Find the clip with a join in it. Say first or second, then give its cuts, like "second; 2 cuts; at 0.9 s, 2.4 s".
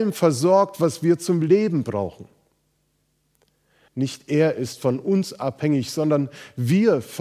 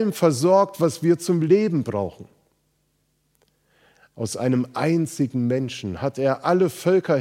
first; 1 cut; at 3.9 s